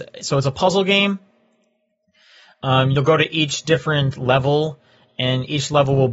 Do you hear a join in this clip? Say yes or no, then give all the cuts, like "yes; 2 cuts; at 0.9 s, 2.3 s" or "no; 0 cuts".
no; 0 cuts